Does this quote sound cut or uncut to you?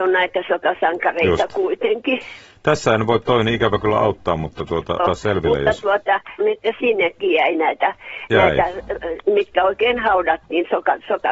cut